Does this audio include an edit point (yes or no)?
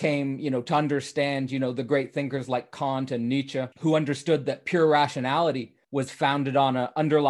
yes